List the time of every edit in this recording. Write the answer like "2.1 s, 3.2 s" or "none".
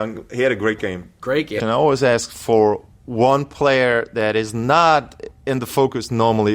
1.6 s